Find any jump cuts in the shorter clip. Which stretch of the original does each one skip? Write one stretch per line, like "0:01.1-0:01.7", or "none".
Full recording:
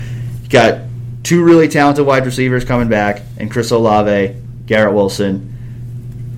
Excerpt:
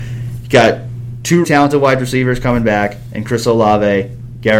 0:01.4-0:01.7

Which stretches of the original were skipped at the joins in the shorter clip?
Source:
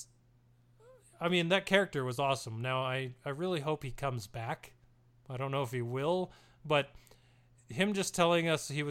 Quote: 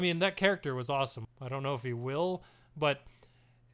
0:02.5-0:05.1

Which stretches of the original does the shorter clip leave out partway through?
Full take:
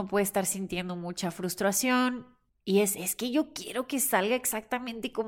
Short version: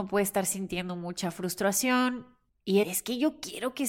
0:02.8-0:03.0

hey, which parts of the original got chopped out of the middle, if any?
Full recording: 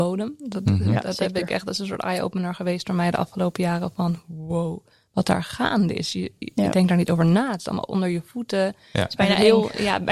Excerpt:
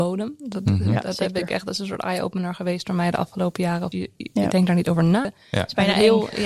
0:03.9-0:06.1
0:07.5-0:08.7

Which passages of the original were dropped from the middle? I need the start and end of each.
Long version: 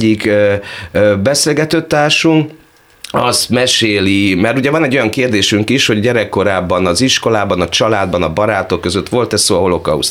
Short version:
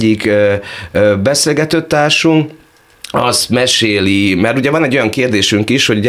none

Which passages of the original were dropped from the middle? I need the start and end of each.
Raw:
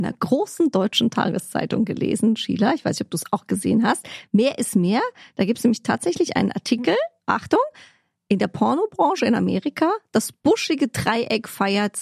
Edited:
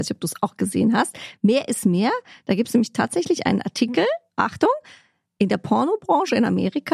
none

